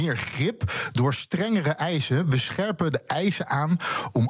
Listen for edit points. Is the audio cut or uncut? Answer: uncut